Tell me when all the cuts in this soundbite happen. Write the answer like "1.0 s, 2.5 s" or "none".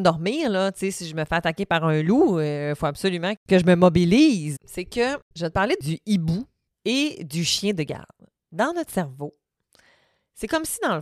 4.6 s